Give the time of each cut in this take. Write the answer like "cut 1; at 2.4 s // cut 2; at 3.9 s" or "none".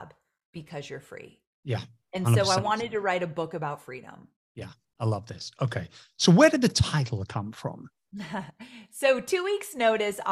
none